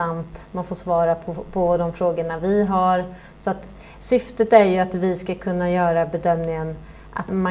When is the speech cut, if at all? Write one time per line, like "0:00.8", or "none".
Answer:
none